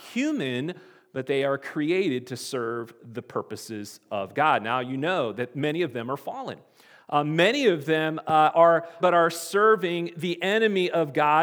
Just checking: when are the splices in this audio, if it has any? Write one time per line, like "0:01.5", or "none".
0:09.0